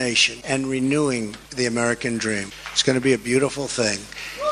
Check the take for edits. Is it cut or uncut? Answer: cut